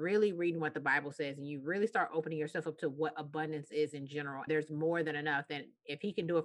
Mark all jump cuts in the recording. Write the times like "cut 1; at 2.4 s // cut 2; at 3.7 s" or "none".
cut 1; at 4.5 s